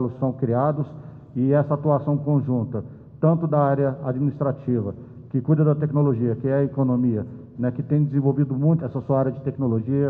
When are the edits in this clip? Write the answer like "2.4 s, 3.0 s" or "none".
7.5 s, 8.8 s